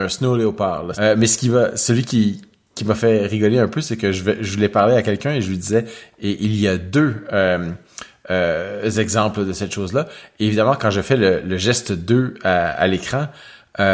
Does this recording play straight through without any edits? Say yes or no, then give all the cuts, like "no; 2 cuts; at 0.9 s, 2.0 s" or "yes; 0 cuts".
no; 1 cut; at 0.9 s